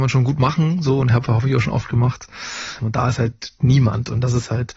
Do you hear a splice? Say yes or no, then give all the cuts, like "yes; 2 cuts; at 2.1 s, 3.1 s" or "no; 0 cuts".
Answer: yes; 1 cut; at 2.8 s